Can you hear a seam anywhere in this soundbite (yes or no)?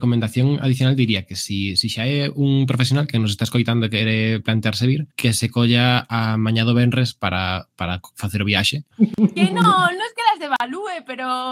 yes